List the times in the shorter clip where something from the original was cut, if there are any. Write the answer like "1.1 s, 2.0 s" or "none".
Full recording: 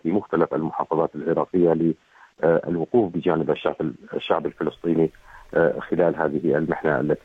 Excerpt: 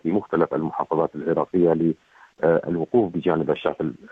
none